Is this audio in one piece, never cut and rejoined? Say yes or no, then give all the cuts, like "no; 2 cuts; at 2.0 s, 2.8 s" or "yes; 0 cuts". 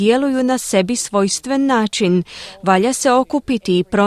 yes; 0 cuts